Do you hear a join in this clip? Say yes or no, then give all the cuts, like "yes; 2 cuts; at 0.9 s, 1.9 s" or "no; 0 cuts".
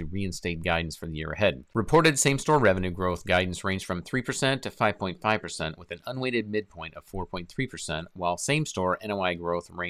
yes; 1 cut; at 1.7 s